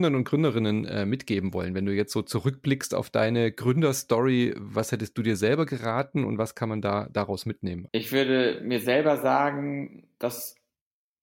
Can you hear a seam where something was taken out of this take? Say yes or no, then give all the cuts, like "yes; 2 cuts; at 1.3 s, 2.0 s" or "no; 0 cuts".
yes; 1 cut; at 7.9 s